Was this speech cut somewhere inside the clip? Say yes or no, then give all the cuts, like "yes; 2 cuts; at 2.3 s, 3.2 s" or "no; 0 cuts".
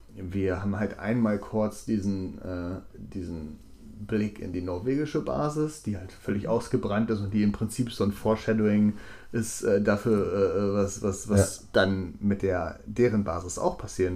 no; 0 cuts